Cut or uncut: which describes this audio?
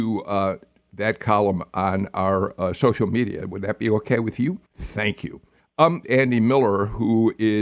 cut